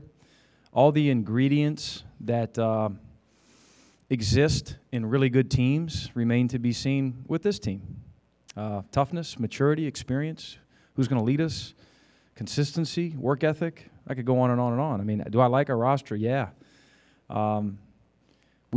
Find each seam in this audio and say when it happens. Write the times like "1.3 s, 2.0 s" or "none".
none

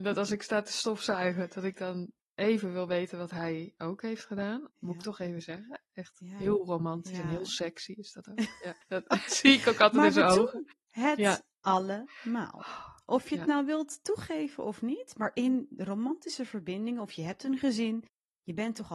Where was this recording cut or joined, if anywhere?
4.7 s, 9.3 s

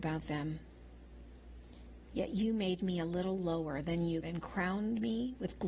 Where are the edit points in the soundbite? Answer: 2.1 s, 4.2 s

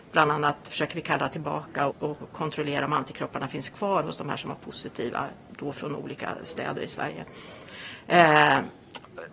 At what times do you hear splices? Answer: 1.9 s

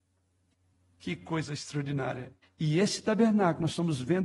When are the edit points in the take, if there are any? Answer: 2.4 s

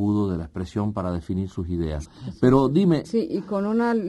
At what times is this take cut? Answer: 2.0 s, 3.0 s

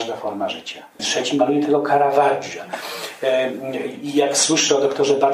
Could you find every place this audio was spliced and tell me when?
1.0 s

